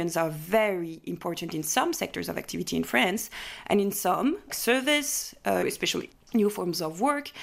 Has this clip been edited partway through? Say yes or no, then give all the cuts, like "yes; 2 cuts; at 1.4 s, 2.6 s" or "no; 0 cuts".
yes; 2 cuts; at 4.5 s, 5.6 s